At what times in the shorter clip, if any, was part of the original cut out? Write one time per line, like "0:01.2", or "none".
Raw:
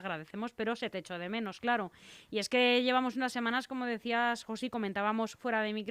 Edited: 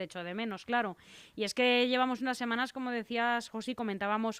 none